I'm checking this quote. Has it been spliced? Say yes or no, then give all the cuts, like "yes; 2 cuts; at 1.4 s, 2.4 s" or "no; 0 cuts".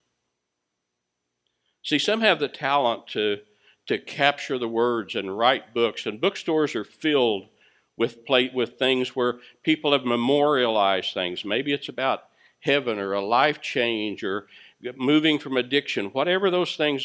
no; 0 cuts